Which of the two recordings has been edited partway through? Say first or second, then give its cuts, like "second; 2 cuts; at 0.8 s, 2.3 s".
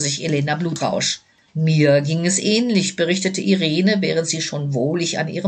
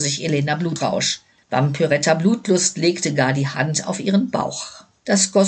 second; 1 cut; at 1.4 s